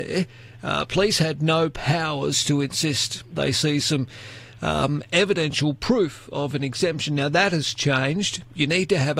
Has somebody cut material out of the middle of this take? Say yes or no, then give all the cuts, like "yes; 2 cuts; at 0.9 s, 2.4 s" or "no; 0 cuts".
no; 0 cuts